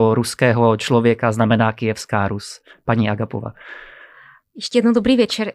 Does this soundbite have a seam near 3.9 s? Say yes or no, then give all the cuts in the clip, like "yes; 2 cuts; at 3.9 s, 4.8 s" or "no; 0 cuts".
no; 0 cuts